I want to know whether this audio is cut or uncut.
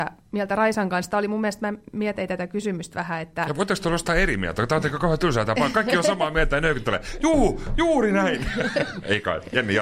uncut